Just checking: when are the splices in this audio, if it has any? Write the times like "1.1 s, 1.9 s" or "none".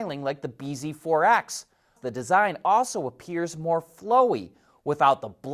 2.0 s